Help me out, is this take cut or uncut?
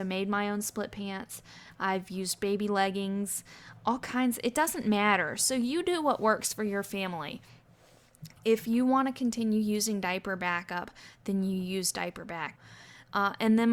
uncut